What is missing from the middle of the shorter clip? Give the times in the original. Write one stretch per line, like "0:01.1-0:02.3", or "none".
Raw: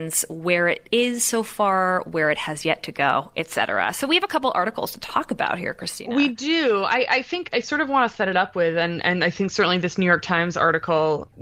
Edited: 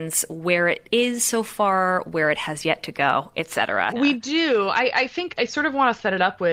0:03.9-0:06.1